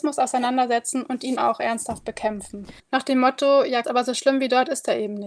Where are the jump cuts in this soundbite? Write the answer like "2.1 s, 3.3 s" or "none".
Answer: 1.4 s, 2.8 s, 3.8 s